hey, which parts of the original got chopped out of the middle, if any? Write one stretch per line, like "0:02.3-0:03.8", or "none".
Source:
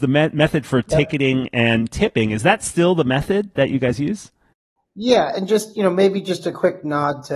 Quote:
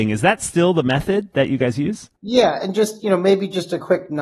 0:04.4-0:04.9

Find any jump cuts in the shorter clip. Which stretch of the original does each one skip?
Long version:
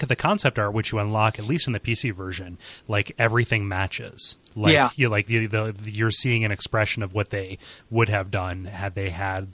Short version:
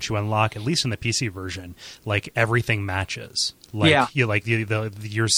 none

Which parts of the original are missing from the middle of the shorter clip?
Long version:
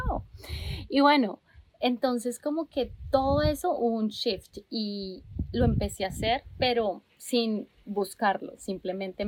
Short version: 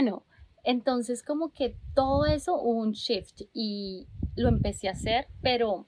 none

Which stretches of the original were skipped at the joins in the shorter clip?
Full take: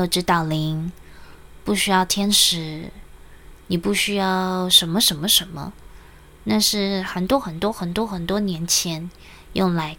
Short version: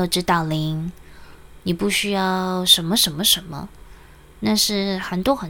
0:01.6-0:03.6

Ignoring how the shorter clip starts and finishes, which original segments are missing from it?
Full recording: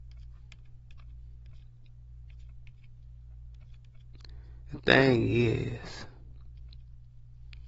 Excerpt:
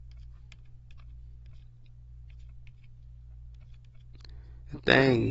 none

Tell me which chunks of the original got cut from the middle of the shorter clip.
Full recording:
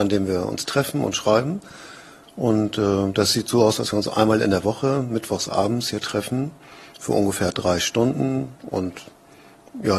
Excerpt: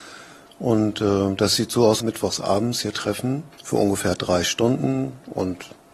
0:03.8-0:05.1
0:06.6-0:06.9

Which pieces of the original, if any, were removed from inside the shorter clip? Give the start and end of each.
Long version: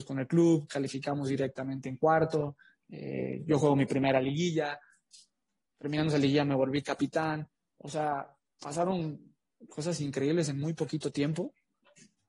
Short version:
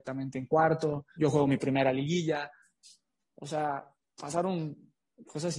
0:02.7-0:03.4
0:05.5-0:07.6

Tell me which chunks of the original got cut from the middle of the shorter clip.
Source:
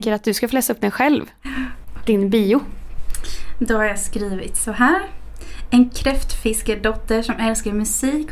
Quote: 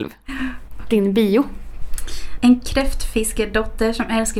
0:03.5-0:05.7

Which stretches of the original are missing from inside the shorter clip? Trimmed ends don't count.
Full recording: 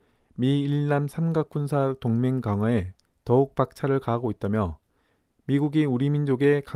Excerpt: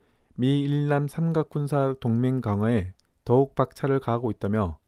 none

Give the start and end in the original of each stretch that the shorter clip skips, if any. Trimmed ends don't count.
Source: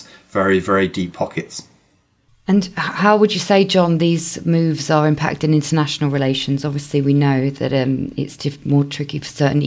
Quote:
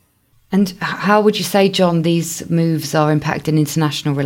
none

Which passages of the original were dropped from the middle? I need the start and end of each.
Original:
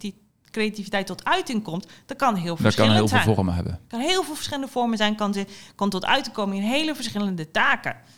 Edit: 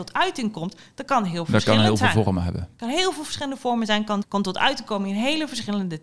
0:05.3-0:05.7

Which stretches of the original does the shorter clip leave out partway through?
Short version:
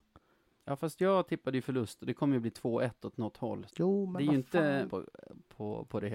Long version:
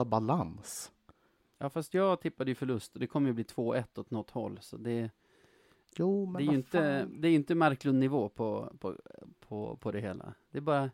0:04.6-0:05.9
0:07.1-0:08.8

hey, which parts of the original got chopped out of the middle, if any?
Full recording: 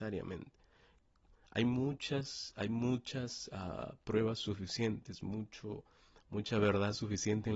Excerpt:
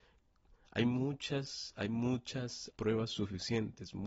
0:03.5-0:04.0

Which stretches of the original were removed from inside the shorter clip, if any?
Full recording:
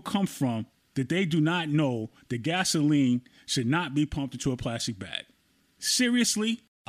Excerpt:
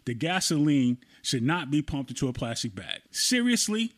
0:05.3-0:05.7

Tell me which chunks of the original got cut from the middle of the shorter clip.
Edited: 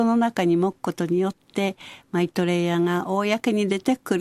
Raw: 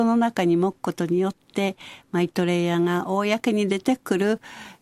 none

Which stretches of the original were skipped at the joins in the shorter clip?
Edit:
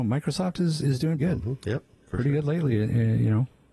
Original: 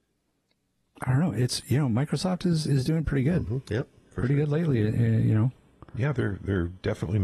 0:03.0-0:03.2

